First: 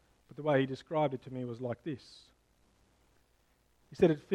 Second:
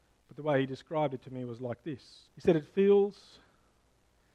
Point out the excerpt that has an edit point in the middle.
second; 1 cut; at 2.3 s

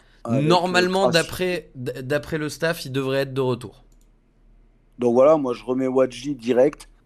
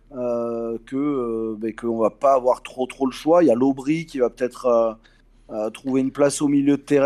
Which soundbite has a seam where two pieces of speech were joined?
first; 1 cut; at 5.6 s

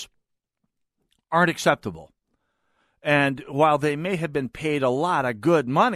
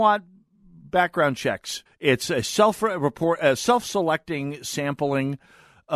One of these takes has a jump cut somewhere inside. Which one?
second; 1 cut; at 1.9 s

